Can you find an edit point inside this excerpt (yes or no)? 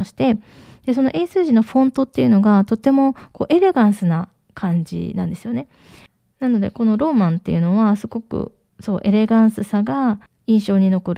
no